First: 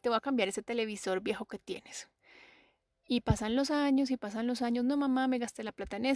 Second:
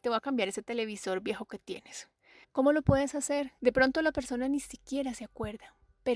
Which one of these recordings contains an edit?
second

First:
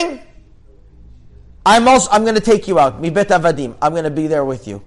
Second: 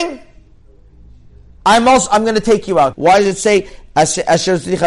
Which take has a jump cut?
second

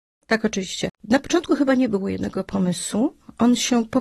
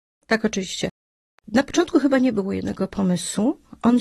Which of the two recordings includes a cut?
first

